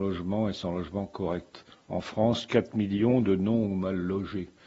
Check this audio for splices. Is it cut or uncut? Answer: uncut